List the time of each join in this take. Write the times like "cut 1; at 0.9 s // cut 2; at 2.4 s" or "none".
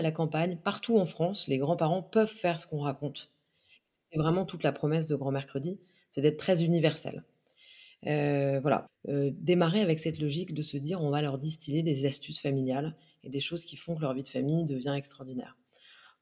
cut 1; at 8.9 s